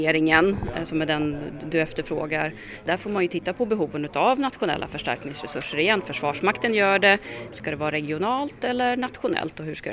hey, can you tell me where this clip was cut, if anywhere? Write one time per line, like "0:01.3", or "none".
0:07.5